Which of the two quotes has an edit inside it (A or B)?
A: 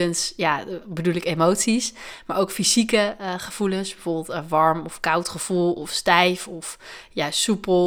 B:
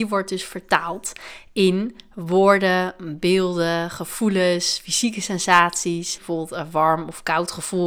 B